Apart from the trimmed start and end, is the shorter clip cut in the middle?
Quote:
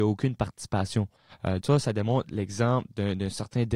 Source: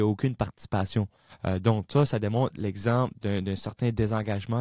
yes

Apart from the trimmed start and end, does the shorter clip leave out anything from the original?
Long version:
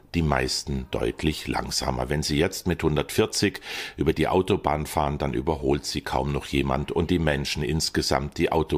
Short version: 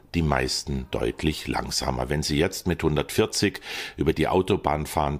no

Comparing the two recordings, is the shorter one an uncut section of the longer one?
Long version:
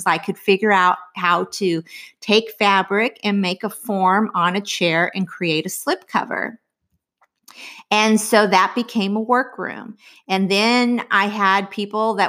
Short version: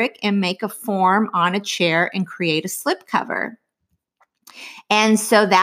yes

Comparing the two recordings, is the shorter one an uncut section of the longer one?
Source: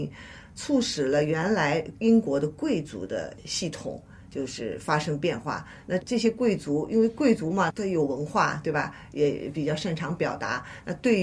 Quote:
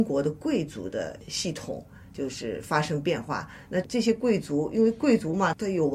yes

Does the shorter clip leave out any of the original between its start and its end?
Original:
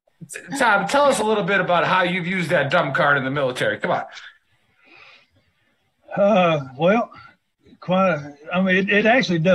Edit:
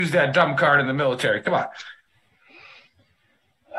no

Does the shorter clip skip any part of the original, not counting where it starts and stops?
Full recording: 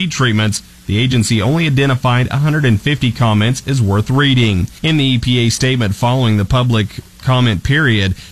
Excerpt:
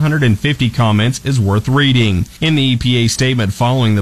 no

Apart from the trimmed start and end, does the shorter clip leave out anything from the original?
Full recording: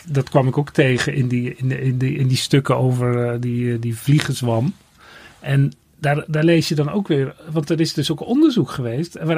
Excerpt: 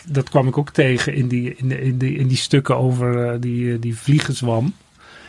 no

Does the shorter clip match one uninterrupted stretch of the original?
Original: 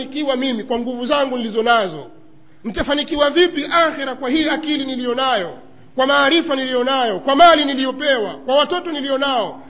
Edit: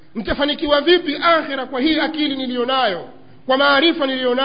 yes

